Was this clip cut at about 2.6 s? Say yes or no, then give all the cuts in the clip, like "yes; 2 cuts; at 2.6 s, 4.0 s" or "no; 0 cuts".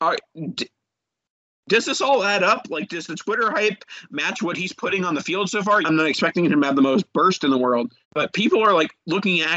no; 2 cuts; at 5.8 s, 8.0 s